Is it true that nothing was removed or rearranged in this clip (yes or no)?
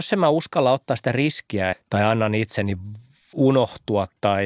no